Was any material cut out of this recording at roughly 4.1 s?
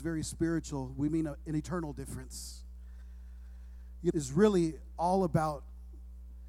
yes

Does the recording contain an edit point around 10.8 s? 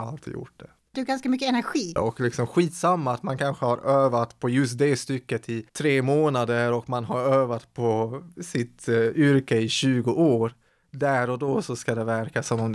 no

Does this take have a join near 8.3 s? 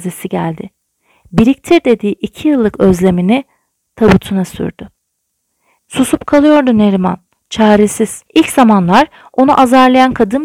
yes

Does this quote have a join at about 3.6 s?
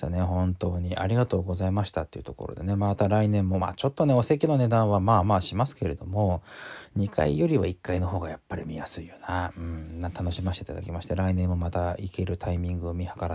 no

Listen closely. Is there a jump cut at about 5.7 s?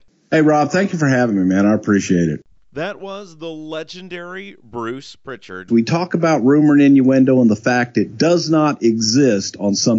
yes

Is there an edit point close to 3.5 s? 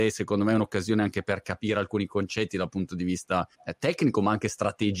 yes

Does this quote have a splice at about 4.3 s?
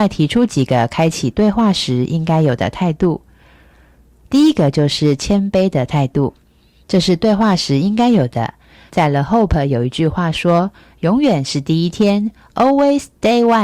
no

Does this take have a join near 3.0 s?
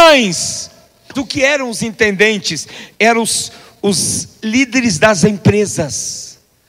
no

